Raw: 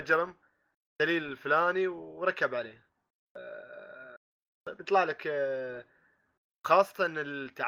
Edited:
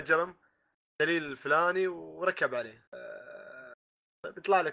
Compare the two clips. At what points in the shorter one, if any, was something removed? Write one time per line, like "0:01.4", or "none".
0:02.9